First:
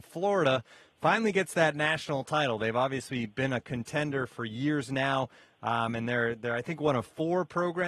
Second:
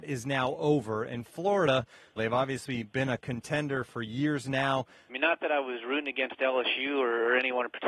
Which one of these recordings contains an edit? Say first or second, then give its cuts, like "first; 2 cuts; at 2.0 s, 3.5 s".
second; 2 cuts; at 2.2 s, 5.1 s